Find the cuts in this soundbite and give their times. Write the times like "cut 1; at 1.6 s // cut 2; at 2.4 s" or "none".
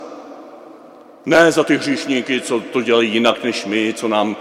none